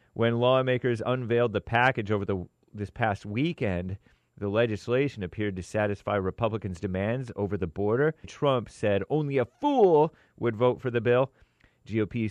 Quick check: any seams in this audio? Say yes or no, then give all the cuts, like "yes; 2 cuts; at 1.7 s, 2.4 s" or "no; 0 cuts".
yes; 1 cut; at 8.2 s